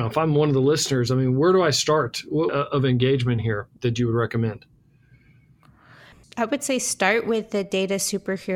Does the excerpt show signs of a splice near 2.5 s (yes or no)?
yes